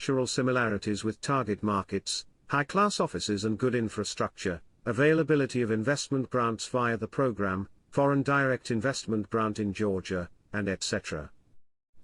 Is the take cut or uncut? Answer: uncut